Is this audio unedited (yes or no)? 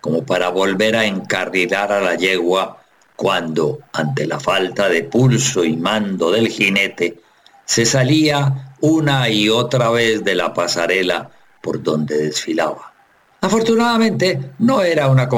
yes